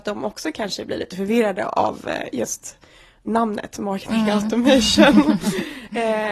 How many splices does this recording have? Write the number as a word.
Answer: zero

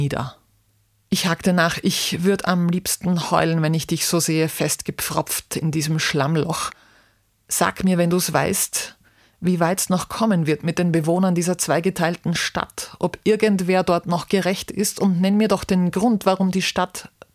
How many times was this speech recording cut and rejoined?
zero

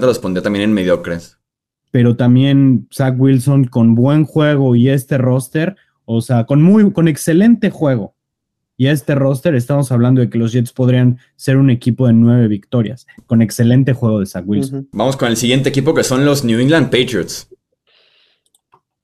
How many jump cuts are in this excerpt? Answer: one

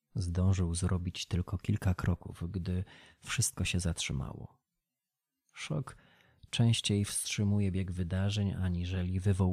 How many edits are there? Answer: zero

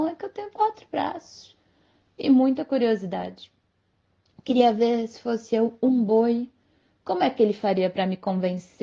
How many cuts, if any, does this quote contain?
zero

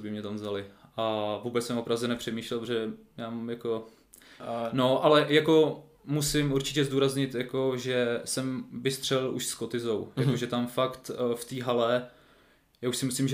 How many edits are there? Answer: one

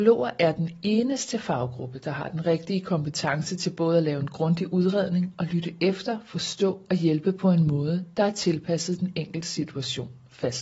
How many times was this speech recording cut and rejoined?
zero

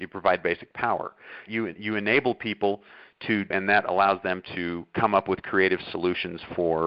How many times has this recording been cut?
two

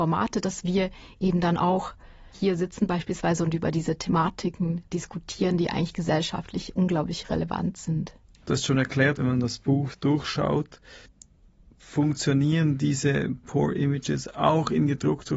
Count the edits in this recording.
one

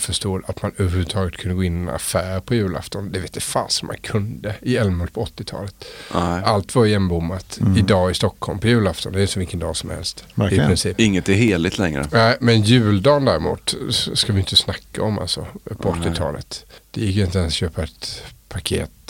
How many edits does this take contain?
zero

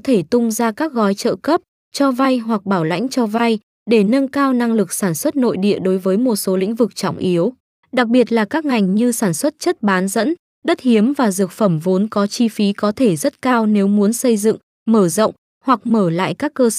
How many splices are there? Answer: zero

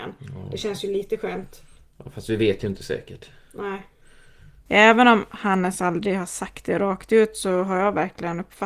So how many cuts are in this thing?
one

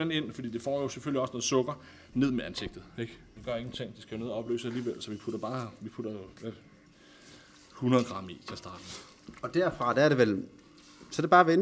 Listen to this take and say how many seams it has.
two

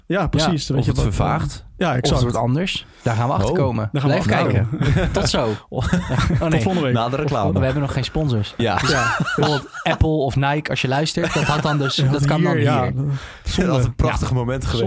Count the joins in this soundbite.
one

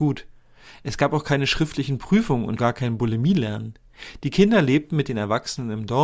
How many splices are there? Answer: one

